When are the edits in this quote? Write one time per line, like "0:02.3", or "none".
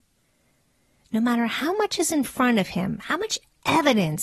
none